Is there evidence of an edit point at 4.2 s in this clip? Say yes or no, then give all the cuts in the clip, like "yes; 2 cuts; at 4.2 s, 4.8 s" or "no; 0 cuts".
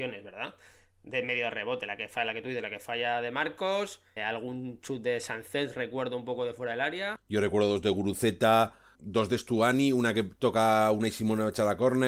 yes; 3 cuts; at 4.2 s, 7.2 s, 8.9 s